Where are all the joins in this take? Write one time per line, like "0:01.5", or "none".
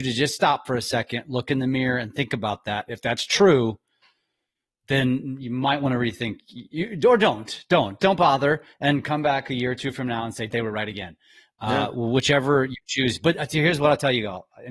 0:08.0
0:10.5